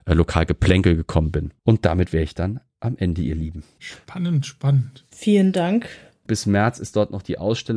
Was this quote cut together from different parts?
yes; 2 cuts; at 1.6 s, 6.3 s

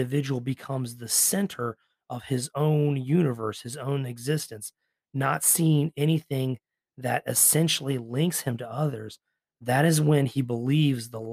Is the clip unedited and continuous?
yes; 0 cuts

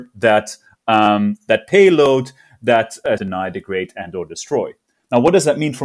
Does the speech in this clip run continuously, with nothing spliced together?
no; 1 cut; at 3.2 s

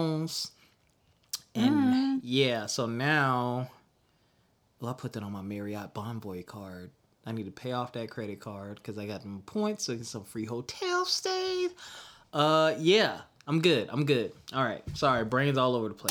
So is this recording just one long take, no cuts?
yes; 0 cuts

